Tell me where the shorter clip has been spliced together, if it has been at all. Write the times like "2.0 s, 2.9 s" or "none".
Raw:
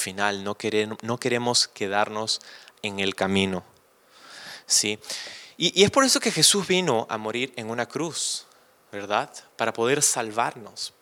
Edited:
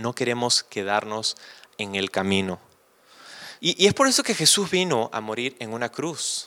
3.6 s